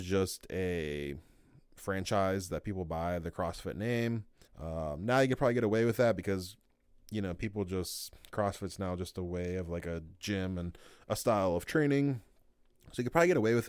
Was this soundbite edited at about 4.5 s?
yes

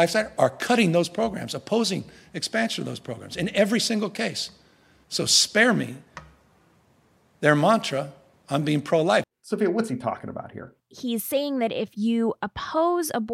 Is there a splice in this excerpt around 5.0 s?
no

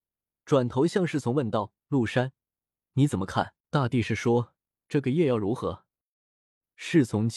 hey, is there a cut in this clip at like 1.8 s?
no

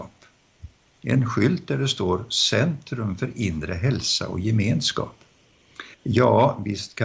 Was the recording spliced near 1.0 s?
no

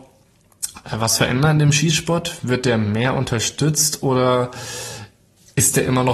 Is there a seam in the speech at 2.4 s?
no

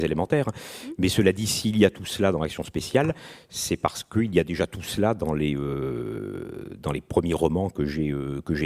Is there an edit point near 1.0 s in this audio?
no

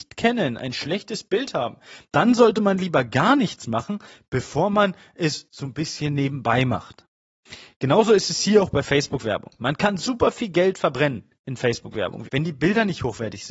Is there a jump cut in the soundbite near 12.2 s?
yes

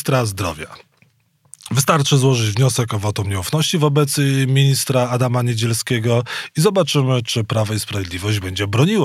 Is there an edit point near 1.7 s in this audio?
no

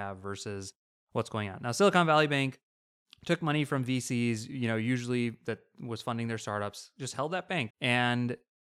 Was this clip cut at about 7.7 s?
yes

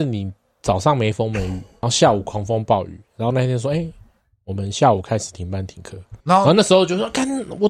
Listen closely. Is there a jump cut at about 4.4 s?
no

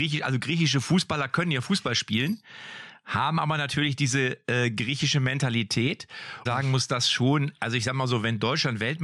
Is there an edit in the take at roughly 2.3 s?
no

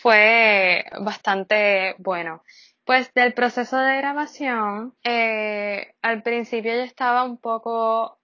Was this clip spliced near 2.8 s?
yes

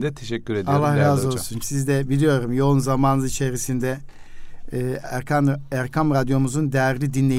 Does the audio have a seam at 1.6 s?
yes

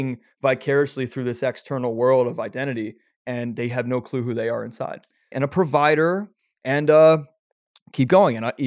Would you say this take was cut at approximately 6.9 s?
no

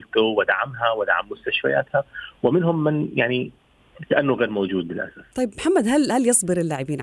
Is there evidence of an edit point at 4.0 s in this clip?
no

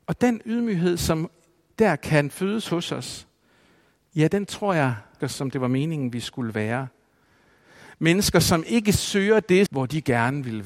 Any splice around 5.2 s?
yes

